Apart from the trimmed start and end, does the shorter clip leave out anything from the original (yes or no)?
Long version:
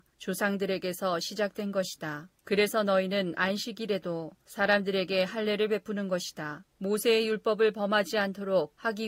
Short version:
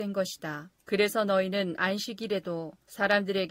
no